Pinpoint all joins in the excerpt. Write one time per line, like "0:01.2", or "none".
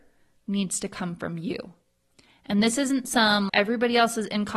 0:03.5